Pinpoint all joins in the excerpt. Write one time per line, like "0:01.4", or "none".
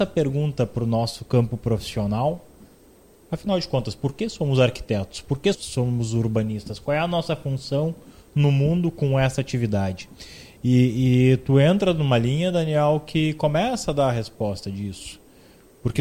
0:05.5